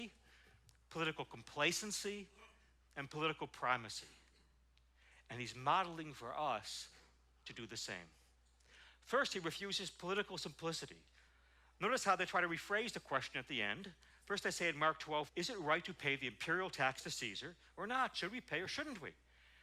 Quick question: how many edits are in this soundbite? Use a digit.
2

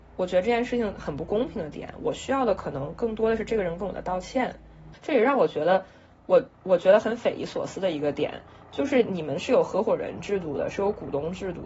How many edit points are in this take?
2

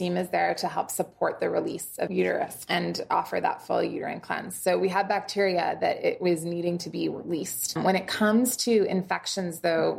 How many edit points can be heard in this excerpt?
0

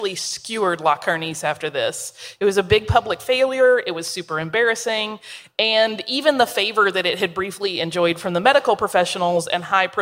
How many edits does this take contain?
0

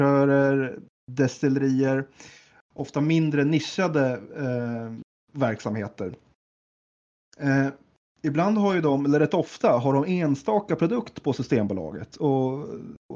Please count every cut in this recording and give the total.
0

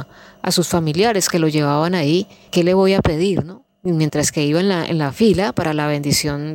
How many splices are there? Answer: 0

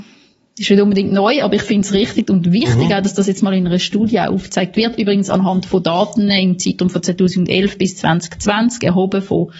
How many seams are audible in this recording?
0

